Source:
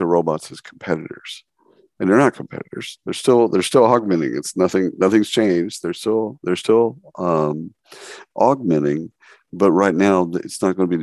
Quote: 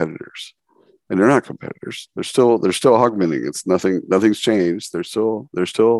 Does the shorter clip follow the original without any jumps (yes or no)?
yes